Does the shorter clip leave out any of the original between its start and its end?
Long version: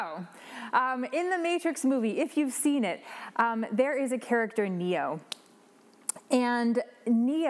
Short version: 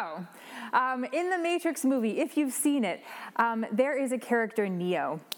no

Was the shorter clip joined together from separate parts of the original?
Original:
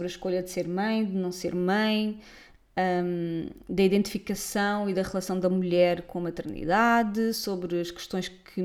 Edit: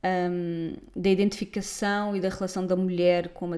no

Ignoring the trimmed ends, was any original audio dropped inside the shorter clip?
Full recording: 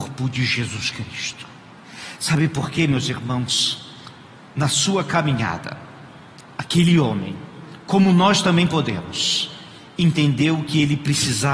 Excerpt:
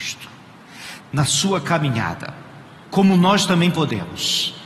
yes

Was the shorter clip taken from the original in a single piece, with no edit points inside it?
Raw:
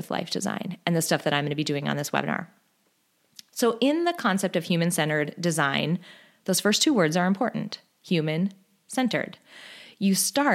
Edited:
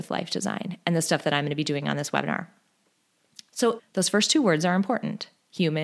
no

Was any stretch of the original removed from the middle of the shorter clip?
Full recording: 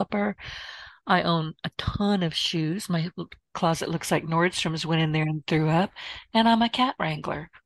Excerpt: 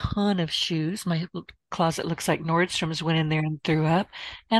no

